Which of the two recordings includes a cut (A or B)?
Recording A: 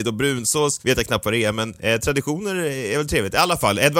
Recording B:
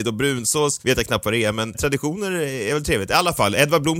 B